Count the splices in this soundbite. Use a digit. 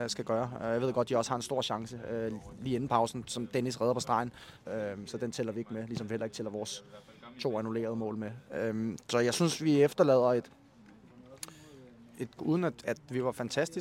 2